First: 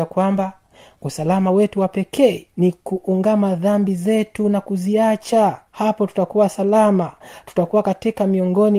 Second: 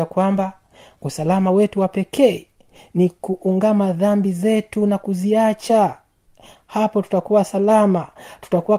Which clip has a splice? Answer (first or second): first